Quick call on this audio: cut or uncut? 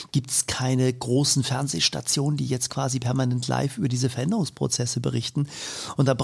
uncut